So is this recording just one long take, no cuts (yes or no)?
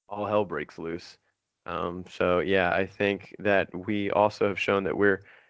yes